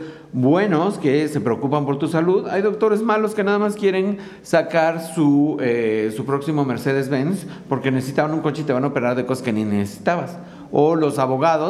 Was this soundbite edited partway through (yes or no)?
no